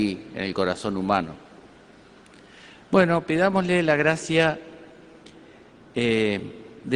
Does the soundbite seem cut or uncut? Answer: uncut